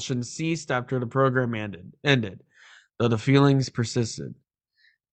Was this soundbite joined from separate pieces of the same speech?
no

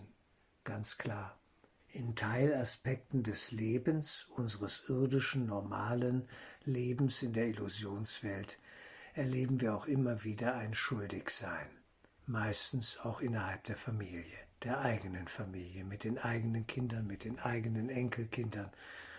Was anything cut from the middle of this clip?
yes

